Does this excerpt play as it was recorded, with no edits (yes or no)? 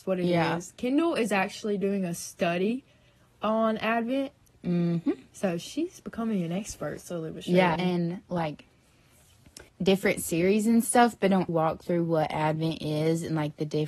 no